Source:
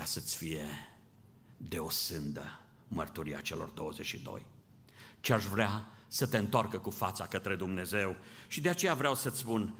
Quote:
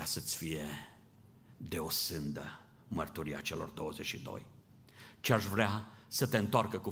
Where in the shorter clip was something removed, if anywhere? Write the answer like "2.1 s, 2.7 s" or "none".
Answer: none